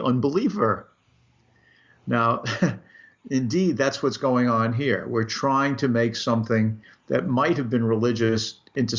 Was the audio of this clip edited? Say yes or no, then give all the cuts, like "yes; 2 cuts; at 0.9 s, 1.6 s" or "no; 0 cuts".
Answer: no; 0 cuts